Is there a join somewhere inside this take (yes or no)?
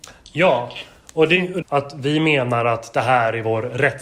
yes